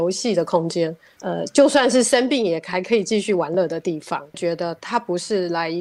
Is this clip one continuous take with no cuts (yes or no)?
no